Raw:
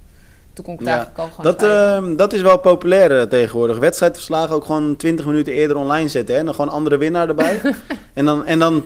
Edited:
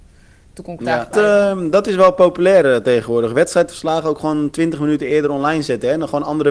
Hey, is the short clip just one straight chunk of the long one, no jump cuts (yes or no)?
no